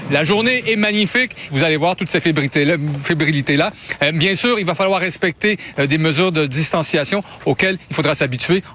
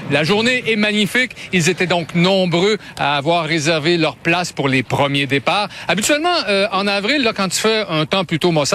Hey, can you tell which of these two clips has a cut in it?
first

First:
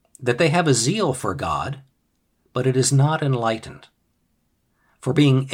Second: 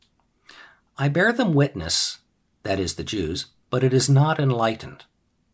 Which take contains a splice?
second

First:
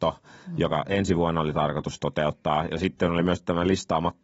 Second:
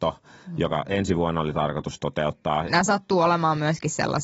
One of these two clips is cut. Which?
second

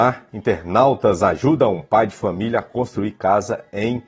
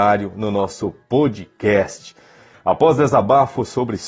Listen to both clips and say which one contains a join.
second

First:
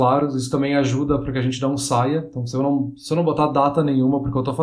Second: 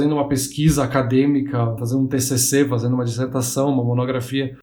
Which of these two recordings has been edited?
second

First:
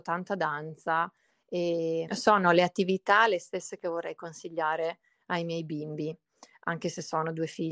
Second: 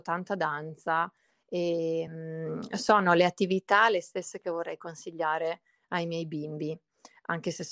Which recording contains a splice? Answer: first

